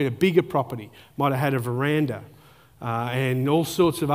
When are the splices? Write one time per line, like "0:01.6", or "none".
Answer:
none